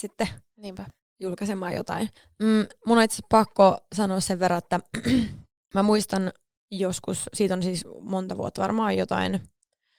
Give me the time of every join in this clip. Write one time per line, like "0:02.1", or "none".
none